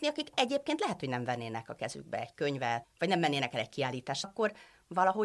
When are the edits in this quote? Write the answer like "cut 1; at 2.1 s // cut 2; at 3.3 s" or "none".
cut 1; at 2.8 s // cut 2; at 4.2 s